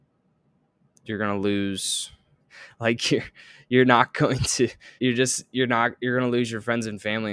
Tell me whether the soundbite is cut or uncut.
cut